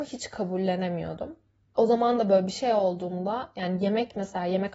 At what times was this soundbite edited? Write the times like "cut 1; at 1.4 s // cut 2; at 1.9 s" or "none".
cut 1; at 1.7 s